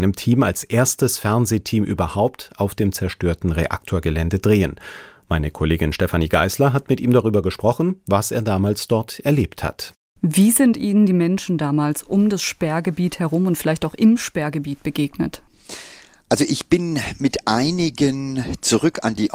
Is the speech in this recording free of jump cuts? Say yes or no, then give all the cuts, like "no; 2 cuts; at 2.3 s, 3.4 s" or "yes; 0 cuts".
yes; 0 cuts